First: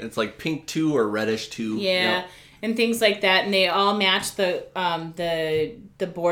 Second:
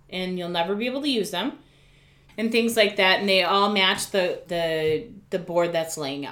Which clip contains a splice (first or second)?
second